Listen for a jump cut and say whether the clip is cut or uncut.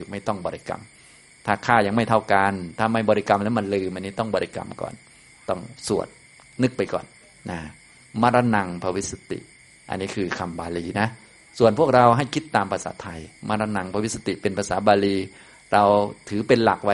uncut